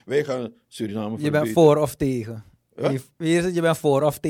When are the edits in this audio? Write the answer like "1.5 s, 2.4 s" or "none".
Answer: none